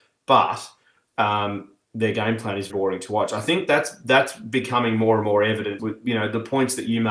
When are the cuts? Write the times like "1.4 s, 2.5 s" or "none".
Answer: 2.7 s, 5.8 s